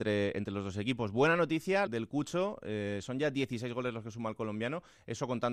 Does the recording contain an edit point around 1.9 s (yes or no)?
yes